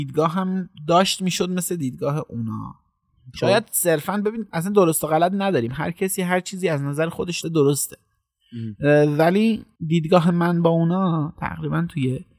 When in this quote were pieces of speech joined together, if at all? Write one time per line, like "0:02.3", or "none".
0:07.4
0:09.8